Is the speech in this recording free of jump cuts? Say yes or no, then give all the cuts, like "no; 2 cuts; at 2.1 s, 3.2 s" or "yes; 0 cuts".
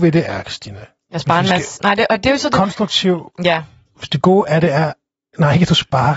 yes; 0 cuts